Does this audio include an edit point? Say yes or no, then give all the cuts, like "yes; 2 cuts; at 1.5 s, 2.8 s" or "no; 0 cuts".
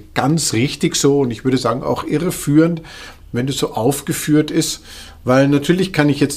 no; 0 cuts